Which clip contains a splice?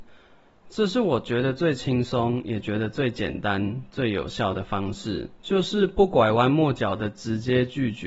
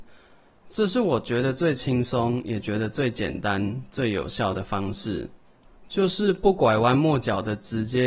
first; 1 cut; at 5.4 s

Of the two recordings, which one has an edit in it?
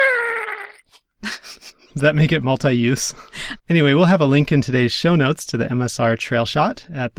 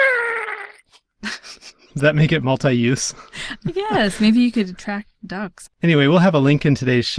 first; 1 cut; at 3.6 s

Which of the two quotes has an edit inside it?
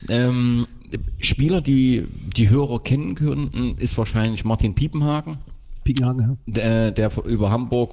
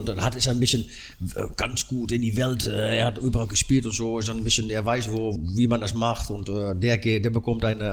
second; 1 cut; at 5.4 s

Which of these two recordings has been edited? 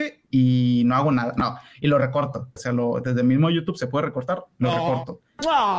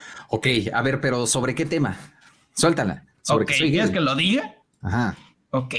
first; 1 cut; at 2.6 s

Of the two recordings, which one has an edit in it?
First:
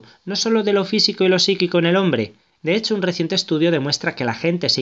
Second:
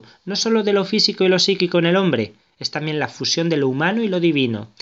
first; 1 cut; at 2.5 s

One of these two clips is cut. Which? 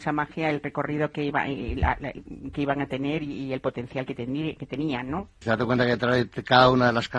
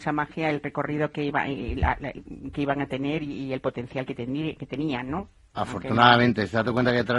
first; 1 cut; at 5.4 s

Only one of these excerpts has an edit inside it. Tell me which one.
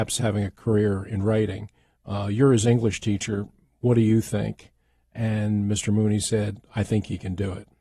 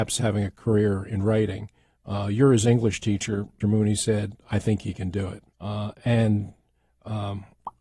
second; 2 cuts; at 3.6 s, 5.5 s

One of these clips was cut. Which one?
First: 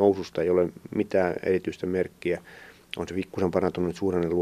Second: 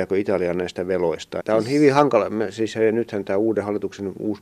second; 1 cut; at 1.4 s

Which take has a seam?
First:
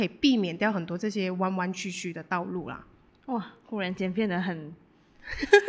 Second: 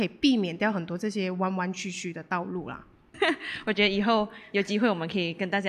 second; 1 cut; at 3.1 s

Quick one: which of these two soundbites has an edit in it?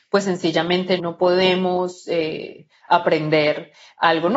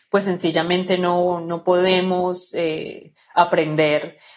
first; 1 cut; at 1.0 s

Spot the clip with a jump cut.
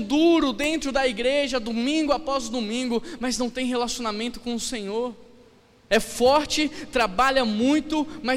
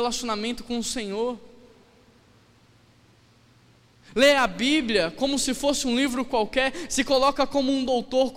first; 1 cut; at 5.9 s

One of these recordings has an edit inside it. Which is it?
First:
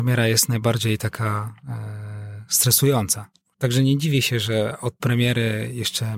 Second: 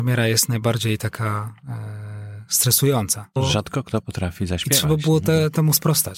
second; 1 cut; at 3.4 s

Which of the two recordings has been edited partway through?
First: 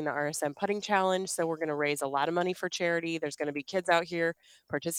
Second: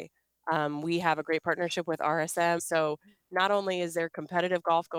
second; 1 cut; at 2.6 s

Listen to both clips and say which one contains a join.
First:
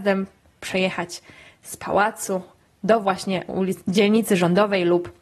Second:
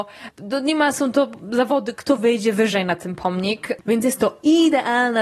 second; 1 cut; at 3.8 s

